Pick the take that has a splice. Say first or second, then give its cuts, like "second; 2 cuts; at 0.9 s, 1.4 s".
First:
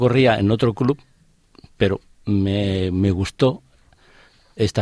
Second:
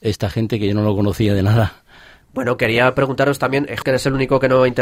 second; 2 cuts; at 2.2 s, 3.8 s